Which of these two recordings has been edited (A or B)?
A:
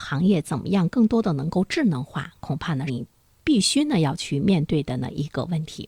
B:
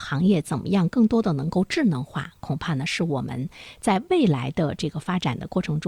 A